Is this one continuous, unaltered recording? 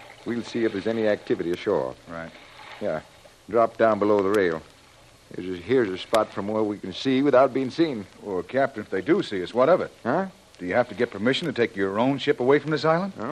no; 1 cut; at 8.8 s

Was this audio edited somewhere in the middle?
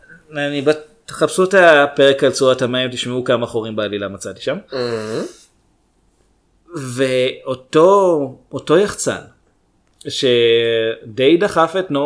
no; 0 cuts

